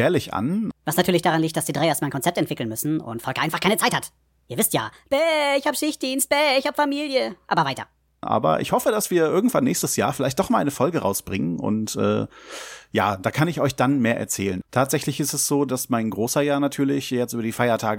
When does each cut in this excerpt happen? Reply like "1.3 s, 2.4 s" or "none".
14.6 s